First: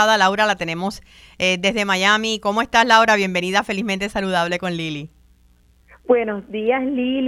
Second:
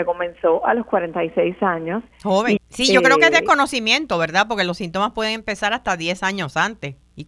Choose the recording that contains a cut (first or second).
second